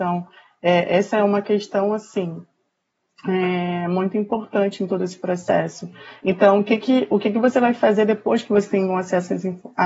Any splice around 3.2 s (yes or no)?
no